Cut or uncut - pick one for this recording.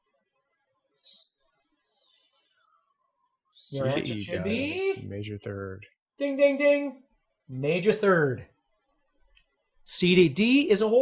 uncut